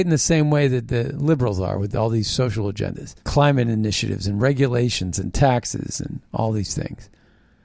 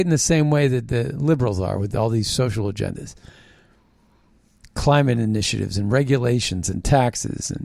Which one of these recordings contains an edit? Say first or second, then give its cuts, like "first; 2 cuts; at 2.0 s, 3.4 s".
first; 1 cut; at 3.2 s